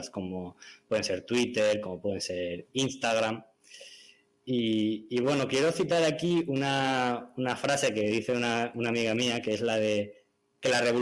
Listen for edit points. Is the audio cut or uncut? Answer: uncut